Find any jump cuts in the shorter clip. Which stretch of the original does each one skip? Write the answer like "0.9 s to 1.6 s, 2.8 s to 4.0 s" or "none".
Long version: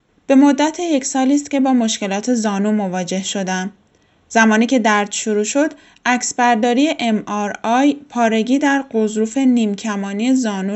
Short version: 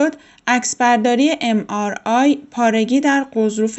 none